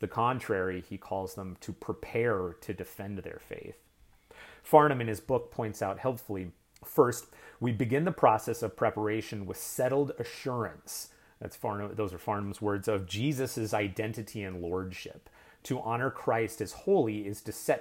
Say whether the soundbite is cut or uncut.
uncut